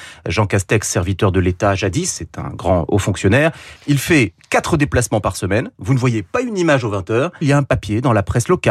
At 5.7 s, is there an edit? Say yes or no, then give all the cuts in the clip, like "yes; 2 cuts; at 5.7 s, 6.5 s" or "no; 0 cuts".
no; 2 cuts; at 3.8 s, 7.4 s